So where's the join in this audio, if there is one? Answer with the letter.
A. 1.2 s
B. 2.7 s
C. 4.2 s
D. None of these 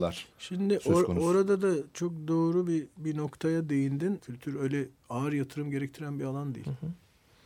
C